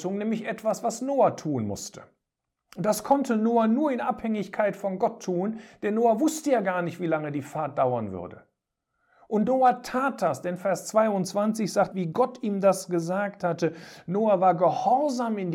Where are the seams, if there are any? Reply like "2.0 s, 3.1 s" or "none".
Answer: 11.9 s